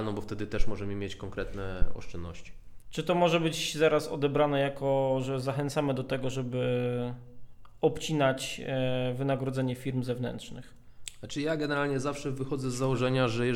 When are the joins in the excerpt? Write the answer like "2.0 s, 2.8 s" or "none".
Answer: 2.8 s